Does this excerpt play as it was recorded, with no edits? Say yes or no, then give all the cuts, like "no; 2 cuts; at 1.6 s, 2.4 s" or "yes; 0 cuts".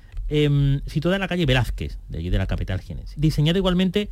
no; 1 cut; at 3.2 s